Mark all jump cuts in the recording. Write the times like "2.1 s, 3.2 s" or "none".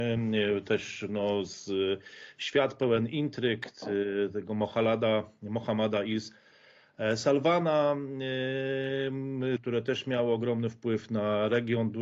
9.6 s